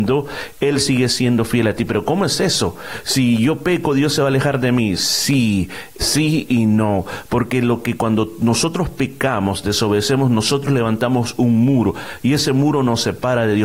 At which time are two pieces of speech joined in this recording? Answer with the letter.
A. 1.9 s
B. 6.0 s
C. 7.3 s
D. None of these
B